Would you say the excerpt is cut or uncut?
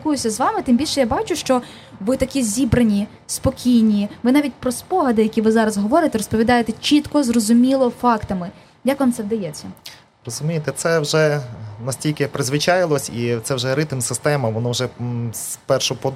uncut